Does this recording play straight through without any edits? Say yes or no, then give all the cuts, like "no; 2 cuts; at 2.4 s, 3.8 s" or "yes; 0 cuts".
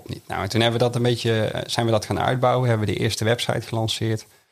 yes; 0 cuts